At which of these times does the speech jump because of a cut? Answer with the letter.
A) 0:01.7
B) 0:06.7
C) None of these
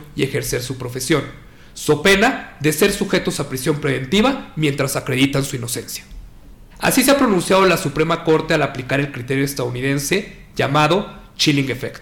B